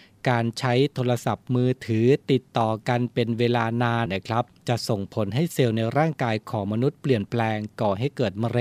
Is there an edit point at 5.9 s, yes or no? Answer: no